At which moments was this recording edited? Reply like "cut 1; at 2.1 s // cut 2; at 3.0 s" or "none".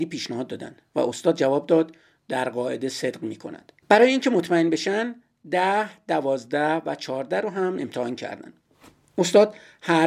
cut 1; at 3.8 s